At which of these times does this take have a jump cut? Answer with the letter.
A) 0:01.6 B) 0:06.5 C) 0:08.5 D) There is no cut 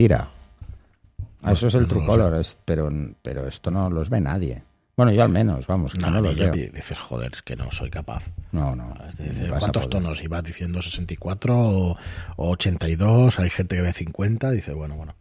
B